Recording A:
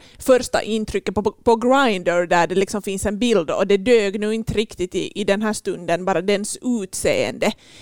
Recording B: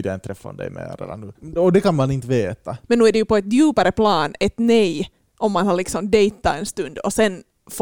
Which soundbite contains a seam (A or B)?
B